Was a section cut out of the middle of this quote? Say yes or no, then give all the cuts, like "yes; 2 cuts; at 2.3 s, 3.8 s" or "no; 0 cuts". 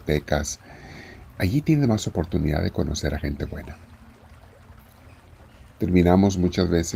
no; 0 cuts